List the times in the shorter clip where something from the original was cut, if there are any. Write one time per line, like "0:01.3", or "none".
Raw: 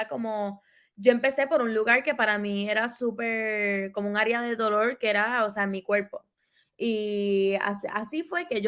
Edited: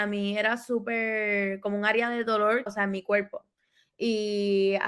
0:02.7